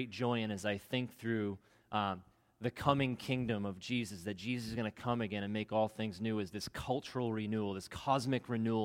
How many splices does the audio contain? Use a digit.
0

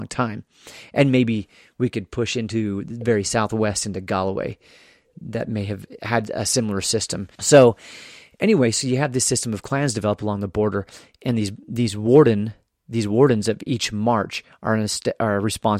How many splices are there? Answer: 1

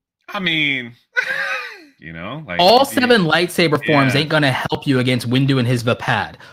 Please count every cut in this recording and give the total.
1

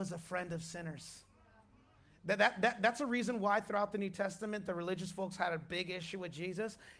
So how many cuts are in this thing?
0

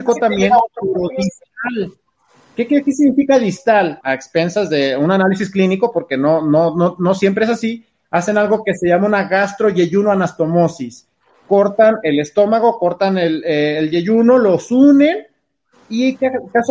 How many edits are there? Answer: 1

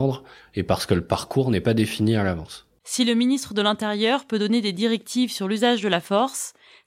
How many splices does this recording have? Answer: 1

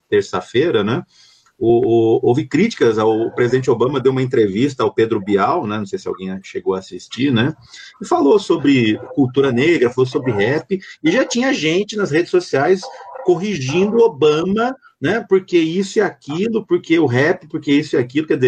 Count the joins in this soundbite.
0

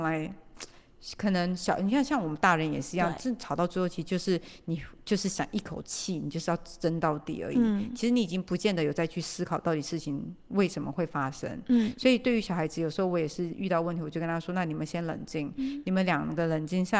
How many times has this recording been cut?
0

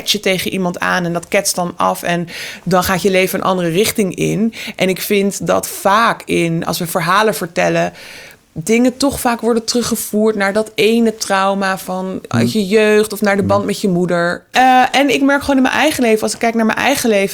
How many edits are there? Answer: 1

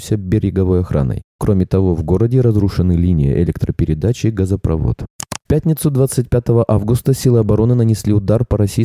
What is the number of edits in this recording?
2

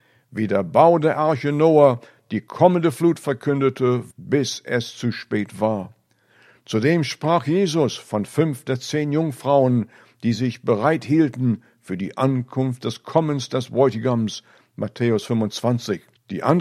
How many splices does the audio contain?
1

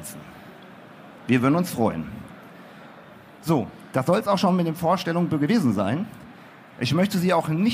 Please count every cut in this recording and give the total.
1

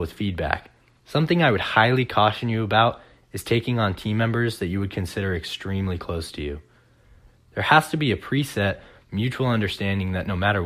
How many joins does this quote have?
1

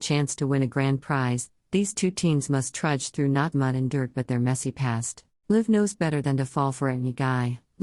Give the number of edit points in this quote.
2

